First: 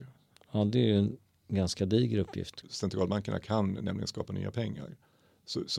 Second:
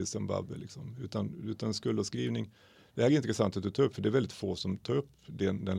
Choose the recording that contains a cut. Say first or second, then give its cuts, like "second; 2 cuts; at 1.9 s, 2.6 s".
first; 1 cut; at 2.6 s